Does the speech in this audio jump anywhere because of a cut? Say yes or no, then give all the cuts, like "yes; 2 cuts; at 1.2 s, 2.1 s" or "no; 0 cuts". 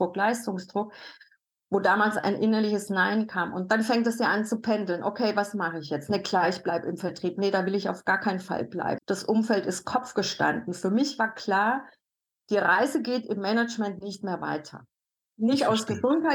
yes; 1 cut; at 9.0 s